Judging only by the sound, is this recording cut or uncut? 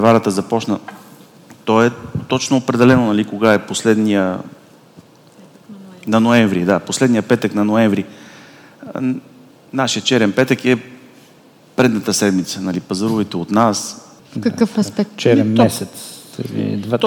cut